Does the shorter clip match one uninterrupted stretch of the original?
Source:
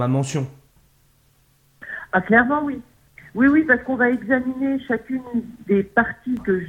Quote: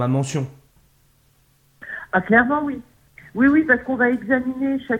yes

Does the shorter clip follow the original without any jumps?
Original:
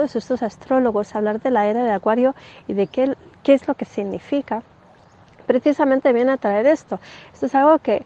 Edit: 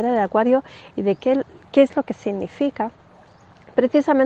yes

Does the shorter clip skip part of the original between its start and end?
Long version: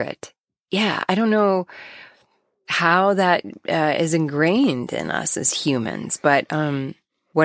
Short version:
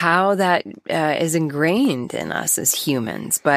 no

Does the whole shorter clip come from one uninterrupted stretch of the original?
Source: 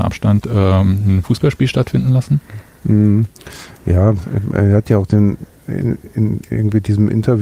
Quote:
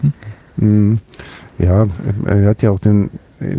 yes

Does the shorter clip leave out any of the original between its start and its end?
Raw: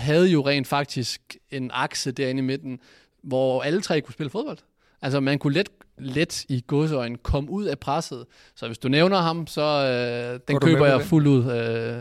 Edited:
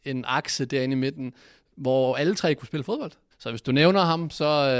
yes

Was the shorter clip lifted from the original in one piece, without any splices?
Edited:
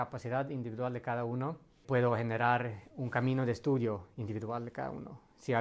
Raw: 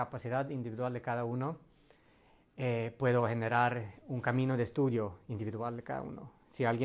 no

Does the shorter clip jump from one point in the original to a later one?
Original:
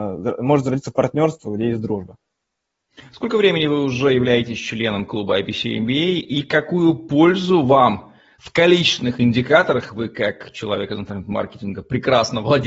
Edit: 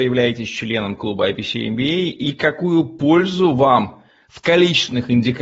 no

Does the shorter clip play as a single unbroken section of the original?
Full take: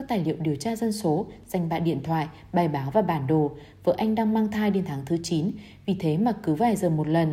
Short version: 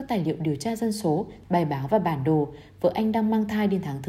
no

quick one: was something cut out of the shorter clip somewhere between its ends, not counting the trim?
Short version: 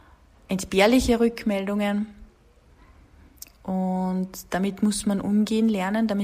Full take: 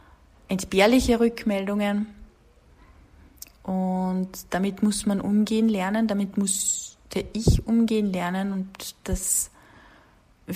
no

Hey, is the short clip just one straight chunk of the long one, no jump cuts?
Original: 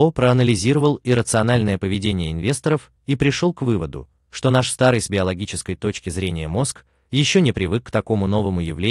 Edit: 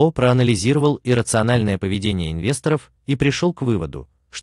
yes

